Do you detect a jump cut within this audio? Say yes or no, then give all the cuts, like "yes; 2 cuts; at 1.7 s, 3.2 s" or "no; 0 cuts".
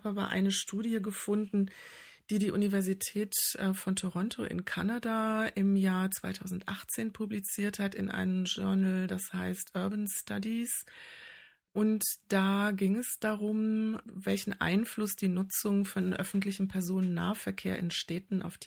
yes; 1 cut; at 14.0 s